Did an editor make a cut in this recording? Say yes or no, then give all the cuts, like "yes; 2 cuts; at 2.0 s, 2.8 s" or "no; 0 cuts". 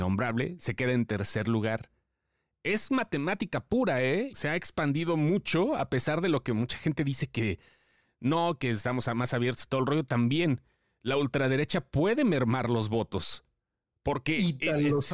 yes; 1 cut; at 4.3 s